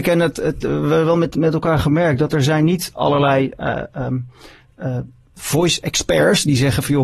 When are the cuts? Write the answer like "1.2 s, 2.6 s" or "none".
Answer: none